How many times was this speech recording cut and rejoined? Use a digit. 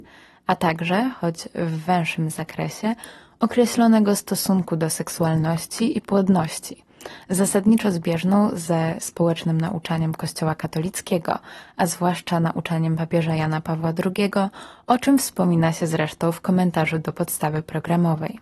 0